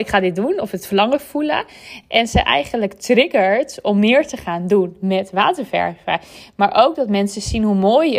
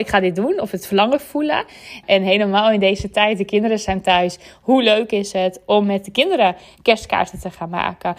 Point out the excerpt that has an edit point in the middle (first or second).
second